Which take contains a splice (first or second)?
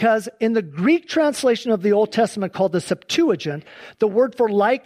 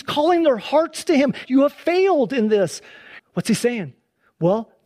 second